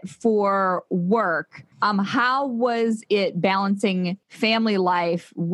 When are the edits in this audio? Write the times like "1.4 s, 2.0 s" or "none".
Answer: 1.7 s, 4.2 s